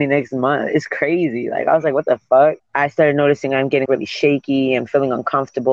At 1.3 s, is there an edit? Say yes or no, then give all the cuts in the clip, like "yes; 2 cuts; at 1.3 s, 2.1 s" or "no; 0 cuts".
no; 2 cuts; at 2.6 s, 3.9 s